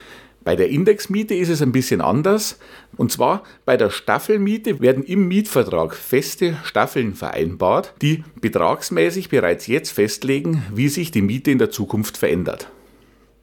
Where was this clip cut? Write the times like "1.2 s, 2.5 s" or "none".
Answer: 3.0 s, 4.8 s, 8.0 s

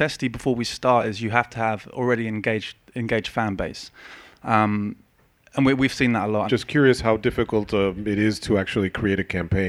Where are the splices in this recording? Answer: 6.5 s

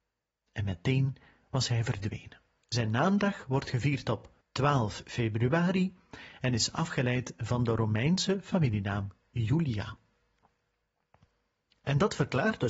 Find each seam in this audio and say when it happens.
2.6 s, 4.4 s

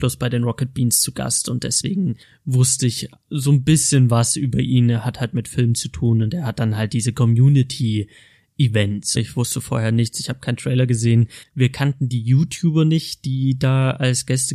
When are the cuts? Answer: 9.2 s, 11.4 s

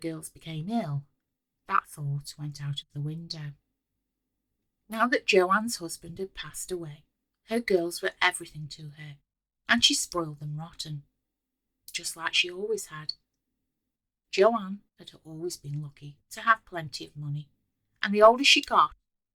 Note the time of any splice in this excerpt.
none

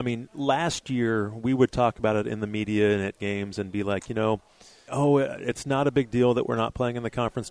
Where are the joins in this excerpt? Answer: 4.9 s

